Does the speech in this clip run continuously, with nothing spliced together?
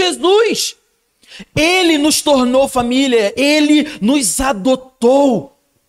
yes; 0 cuts

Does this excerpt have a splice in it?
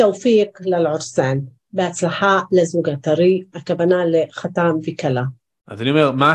no; 0 cuts

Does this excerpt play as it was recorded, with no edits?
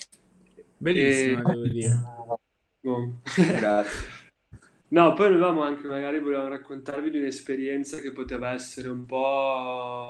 yes; 0 cuts

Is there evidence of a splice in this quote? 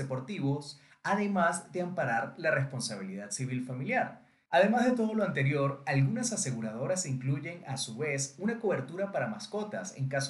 yes; 1 cut; at 4.5 s

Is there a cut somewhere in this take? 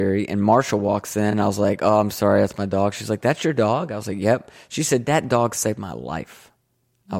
no; 0 cuts

